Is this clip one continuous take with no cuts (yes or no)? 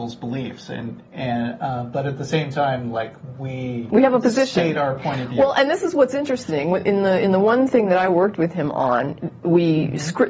yes